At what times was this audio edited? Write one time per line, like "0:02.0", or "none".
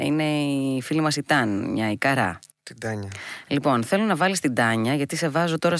0:02.5